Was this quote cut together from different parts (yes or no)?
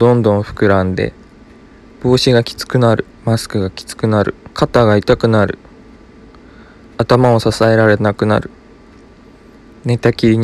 yes